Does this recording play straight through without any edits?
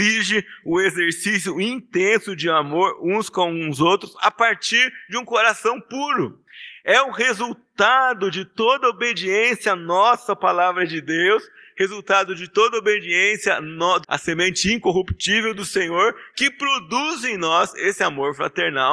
no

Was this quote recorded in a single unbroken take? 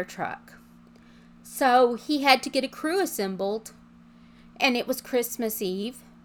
yes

